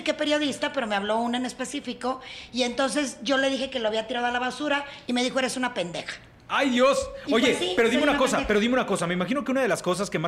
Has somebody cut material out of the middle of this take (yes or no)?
no